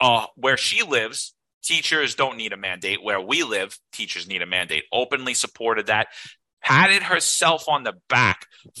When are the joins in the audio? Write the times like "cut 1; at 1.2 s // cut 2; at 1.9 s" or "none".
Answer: none